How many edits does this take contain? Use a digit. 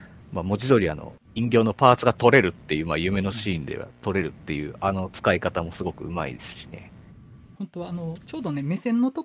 1